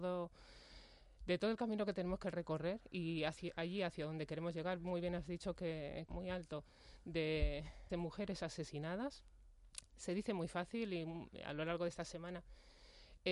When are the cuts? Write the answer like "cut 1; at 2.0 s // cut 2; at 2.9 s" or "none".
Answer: cut 1; at 6.1 s // cut 2; at 7.9 s